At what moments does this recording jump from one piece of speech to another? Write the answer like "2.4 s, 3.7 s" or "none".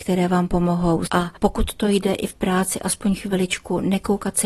1.1 s